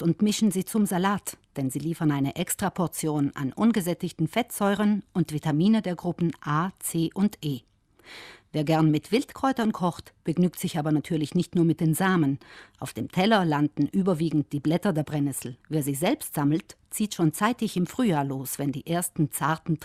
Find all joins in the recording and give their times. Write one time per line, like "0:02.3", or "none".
0:15.6